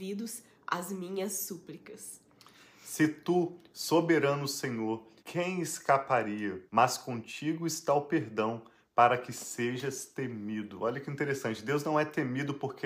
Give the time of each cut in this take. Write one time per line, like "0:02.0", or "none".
0:05.2
0:06.7